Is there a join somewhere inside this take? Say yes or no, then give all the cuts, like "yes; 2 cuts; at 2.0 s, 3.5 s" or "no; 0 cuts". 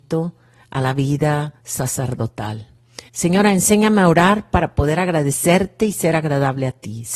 yes; 2 cuts; at 1.6 s, 3.1 s